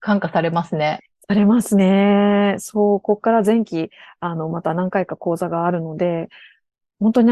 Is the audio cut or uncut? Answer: uncut